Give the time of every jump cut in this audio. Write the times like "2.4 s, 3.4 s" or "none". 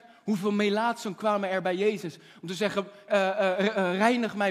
3.1 s